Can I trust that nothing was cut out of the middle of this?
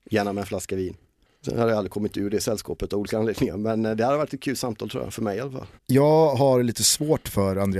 no; 1 cut; at 5.8 s

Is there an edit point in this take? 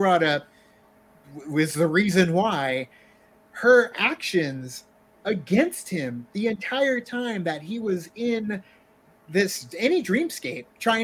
no; 0 cuts

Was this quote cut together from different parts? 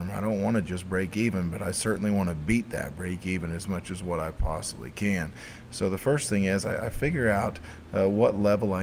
no; 0 cuts

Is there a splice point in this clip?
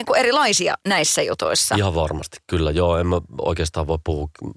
no; 0 cuts

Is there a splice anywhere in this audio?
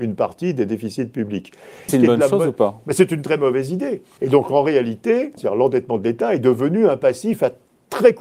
yes; 3 cuts; at 1.9 s, 4.2 s, 5.4 s

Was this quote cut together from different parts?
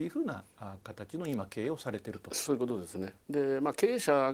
no; 0 cuts

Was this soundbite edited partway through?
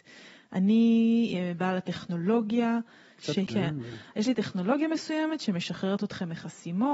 yes; 1 cut; at 3.5 s

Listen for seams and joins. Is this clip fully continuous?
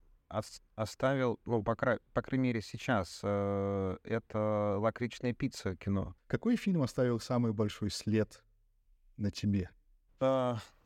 no; 1 cut; at 6.2 s

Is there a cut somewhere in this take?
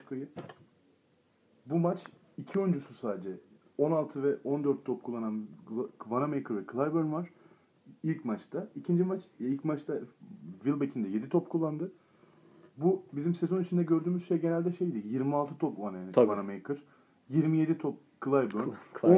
no; 0 cuts

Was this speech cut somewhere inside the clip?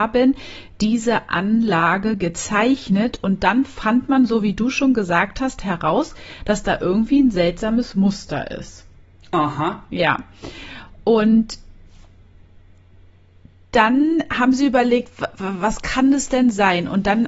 no; 0 cuts

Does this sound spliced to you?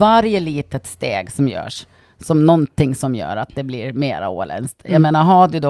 no; 0 cuts

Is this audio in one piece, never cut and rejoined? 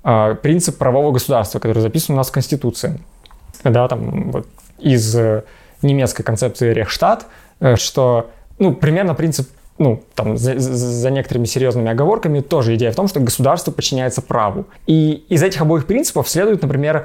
no; 2 cuts; at 7.8 s, 14.8 s

